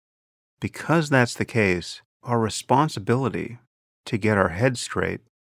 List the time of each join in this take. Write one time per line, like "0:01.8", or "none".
0:02.1